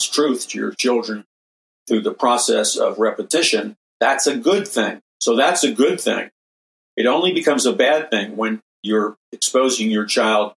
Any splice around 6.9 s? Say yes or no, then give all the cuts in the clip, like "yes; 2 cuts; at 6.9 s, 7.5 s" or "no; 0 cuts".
no; 1 cut; at 5.1 s